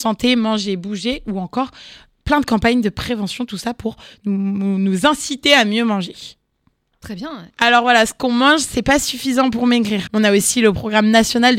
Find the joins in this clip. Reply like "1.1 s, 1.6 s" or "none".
7.5 s, 10.1 s